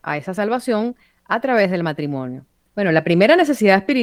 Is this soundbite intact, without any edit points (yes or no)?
no